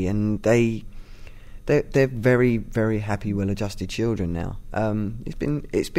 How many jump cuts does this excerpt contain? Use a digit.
0